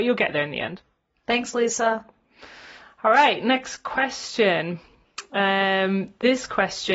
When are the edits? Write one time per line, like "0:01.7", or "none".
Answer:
none